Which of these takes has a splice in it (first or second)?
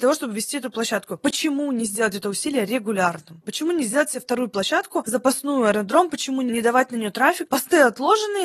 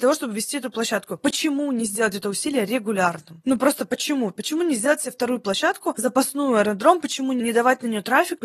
first